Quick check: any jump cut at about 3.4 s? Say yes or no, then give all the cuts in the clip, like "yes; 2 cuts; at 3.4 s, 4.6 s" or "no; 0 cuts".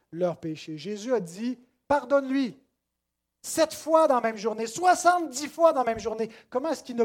no; 1 cut; at 1.8 s